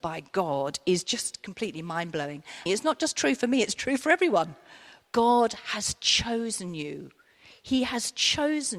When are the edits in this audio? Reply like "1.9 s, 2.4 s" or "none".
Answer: 2.7 s